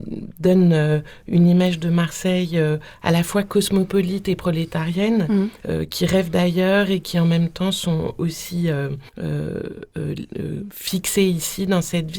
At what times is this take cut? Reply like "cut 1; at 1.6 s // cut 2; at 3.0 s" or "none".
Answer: cut 1; at 5.6 s // cut 2; at 9.1 s